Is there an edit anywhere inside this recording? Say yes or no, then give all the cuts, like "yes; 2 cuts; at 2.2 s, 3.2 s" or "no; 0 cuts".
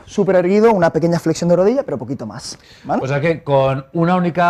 no; 0 cuts